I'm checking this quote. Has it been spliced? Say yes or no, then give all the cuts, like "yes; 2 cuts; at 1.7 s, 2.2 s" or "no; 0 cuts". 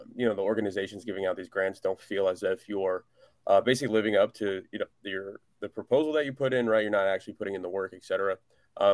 no; 0 cuts